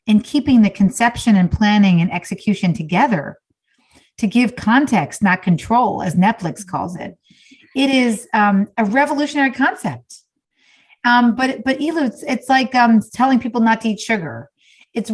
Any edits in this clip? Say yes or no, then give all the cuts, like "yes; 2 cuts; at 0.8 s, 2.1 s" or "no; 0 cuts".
no; 0 cuts